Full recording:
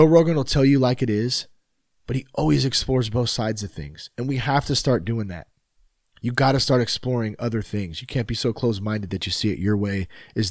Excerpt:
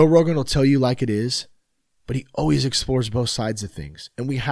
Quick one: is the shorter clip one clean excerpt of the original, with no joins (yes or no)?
yes